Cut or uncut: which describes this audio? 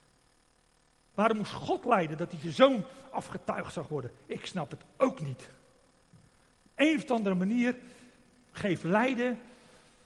cut